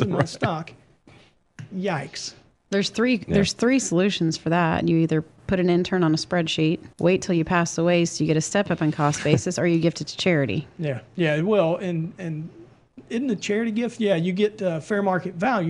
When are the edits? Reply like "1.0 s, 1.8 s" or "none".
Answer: 6.9 s, 11.1 s